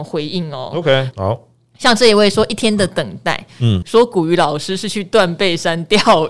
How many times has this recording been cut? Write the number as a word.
two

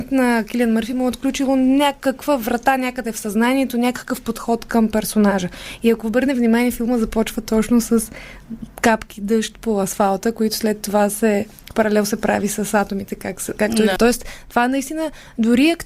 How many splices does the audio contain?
one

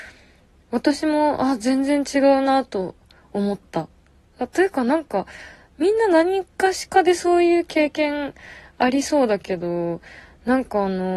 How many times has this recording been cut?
zero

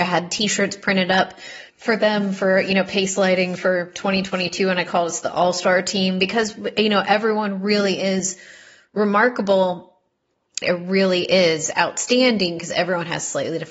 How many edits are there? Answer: two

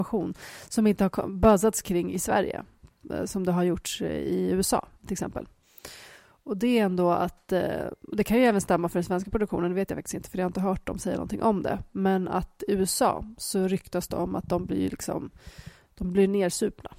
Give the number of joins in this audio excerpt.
one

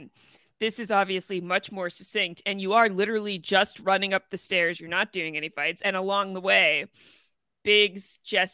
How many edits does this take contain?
zero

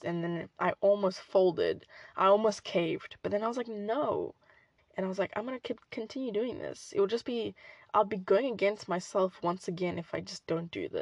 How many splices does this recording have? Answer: one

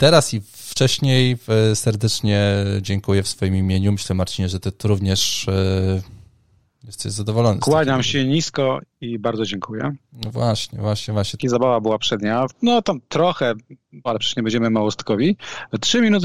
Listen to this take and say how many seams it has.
three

